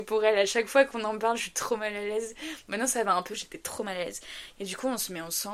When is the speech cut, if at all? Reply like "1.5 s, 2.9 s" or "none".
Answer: 3.3 s, 4.5 s